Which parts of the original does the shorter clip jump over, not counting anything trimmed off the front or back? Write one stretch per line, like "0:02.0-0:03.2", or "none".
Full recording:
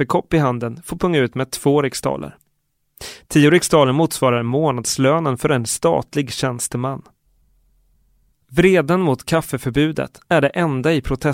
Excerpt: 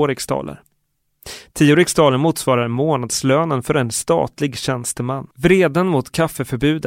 0:07.1-0:08.4